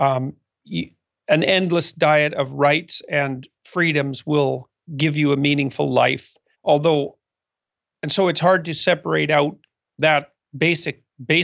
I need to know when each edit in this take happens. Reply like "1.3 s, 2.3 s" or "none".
6.5 s